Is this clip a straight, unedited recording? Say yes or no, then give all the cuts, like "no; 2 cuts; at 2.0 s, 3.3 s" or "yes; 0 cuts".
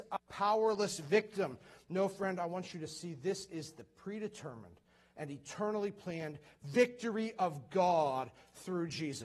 yes; 0 cuts